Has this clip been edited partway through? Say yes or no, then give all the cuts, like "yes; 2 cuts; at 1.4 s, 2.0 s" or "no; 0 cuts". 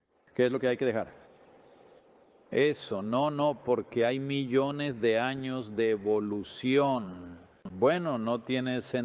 yes; 2 cuts; at 2.5 s, 7.7 s